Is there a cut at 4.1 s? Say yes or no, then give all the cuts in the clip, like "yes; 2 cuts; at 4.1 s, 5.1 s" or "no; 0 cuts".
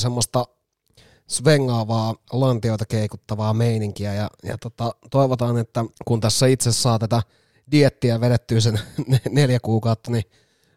no; 1 cut; at 5.9 s